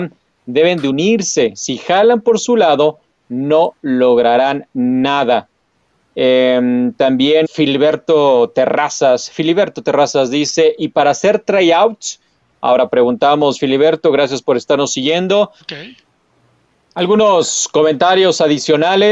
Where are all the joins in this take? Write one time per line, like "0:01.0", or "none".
0:07.4
0:15.6